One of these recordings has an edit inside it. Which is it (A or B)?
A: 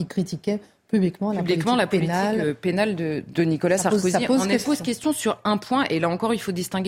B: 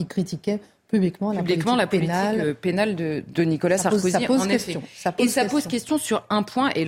A